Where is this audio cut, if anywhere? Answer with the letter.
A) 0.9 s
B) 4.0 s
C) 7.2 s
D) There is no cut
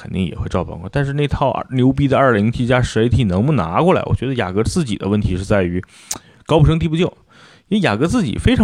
D